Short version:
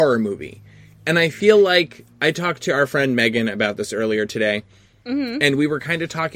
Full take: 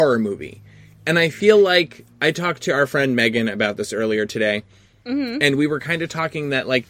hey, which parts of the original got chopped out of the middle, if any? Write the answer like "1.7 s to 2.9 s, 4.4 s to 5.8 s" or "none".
none